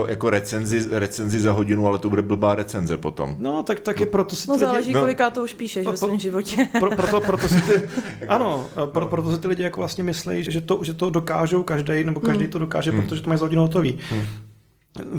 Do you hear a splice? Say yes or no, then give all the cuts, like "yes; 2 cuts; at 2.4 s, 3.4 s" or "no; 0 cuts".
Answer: yes; 1 cut; at 10.5 s